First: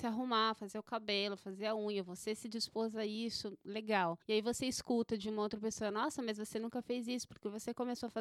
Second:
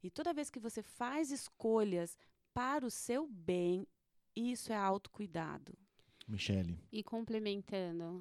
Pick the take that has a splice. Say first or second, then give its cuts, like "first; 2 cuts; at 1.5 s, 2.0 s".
first; 1 cut; at 4.2 s